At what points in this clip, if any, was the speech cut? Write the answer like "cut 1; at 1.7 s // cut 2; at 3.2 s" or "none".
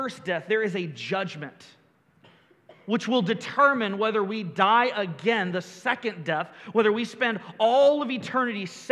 none